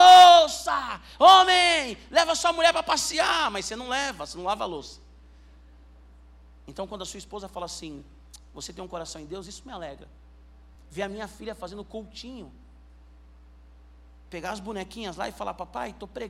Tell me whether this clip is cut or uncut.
uncut